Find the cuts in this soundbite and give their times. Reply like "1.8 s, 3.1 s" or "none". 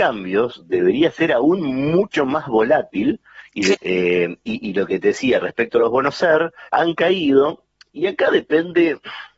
3.7 s, 6.7 s